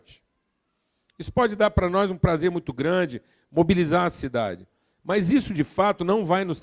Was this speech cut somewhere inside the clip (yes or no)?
no